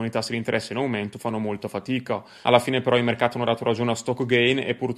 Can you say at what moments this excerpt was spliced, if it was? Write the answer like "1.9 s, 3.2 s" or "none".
2.4 s